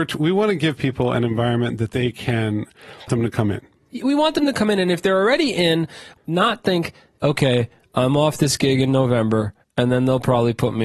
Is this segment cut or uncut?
cut